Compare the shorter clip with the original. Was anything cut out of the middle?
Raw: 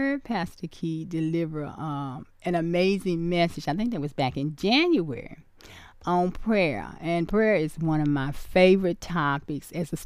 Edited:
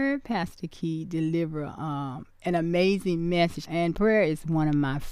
yes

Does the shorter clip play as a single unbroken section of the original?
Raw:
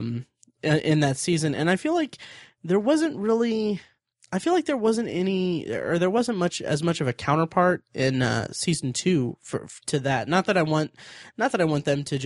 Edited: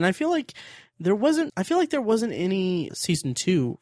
no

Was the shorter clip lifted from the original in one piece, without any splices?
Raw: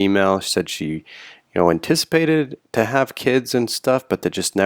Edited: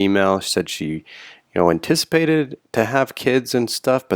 yes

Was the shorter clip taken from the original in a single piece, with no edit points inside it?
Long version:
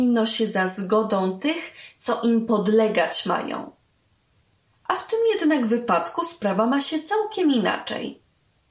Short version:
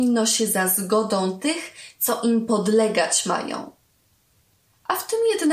yes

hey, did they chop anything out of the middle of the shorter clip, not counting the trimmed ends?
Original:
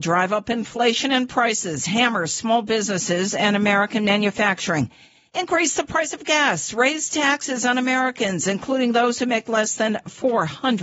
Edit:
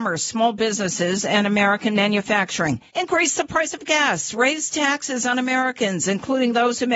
yes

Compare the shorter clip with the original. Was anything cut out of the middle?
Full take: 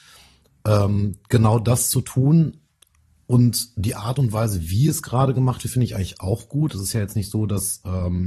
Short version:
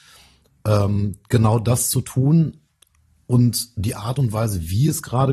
no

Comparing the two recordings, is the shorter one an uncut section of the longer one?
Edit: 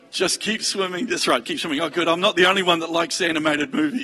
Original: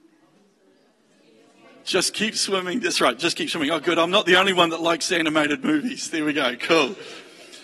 no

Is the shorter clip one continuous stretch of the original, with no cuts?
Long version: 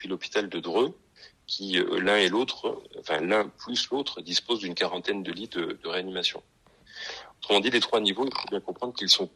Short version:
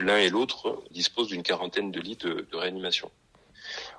no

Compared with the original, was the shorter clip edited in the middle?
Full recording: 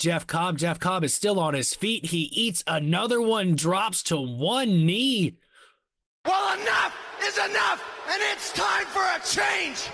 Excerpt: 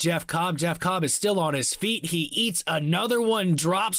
no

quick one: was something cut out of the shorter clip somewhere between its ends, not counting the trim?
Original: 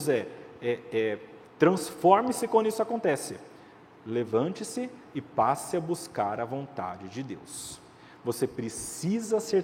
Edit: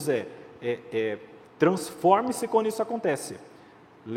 no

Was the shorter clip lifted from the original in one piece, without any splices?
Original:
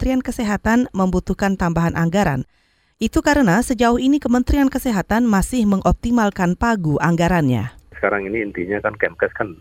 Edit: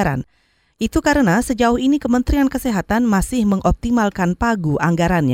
yes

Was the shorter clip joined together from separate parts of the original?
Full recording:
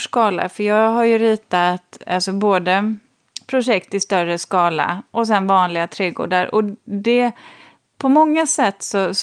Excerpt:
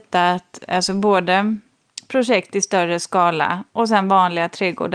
no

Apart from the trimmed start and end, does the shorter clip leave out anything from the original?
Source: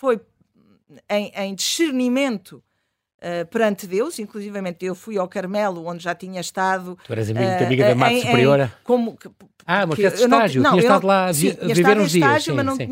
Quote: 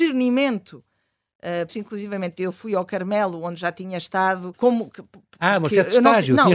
yes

